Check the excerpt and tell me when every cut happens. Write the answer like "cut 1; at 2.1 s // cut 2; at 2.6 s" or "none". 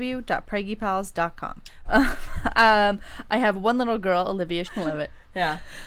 cut 1; at 1.9 s // cut 2; at 4.7 s